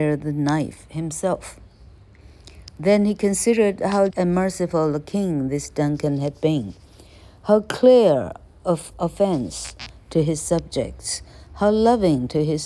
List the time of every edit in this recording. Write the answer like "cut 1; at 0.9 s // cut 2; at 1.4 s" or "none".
cut 1; at 4.1 s